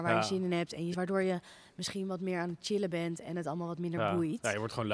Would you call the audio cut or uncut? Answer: cut